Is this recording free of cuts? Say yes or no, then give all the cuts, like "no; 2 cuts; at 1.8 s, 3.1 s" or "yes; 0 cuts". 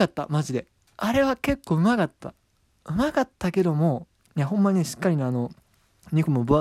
yes; 0 cuts